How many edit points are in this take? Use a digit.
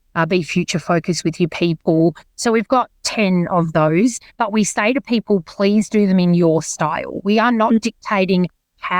0